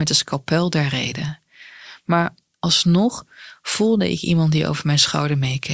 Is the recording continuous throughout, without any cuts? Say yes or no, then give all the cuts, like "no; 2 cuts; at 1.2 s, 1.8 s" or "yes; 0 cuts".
yes; 0 cuts